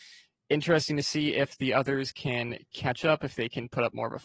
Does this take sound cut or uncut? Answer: uncut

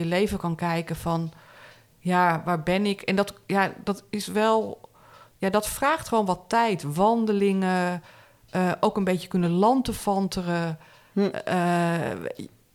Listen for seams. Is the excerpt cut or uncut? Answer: uncut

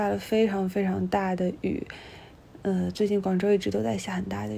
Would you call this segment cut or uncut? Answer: uncut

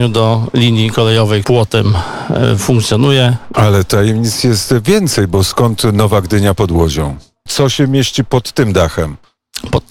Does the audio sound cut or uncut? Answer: cut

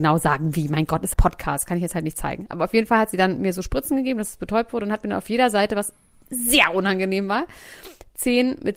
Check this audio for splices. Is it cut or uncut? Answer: cut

